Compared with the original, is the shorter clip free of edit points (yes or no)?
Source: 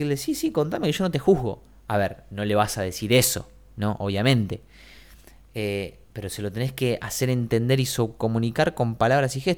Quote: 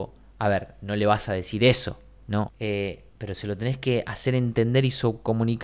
no